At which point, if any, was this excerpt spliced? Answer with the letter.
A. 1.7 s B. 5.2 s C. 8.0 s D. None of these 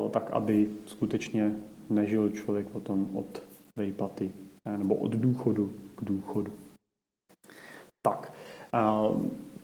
D